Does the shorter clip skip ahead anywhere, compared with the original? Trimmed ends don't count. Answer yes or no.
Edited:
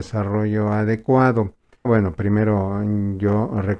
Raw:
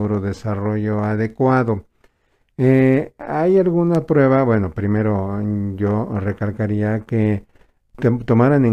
yes